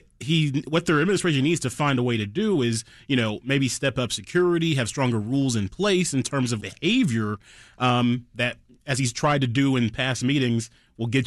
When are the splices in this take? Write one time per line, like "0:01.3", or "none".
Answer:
0:06.6